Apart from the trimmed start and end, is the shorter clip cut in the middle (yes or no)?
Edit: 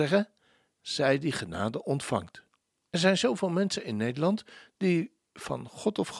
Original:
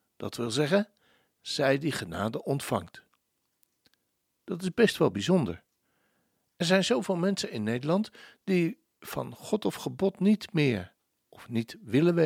yes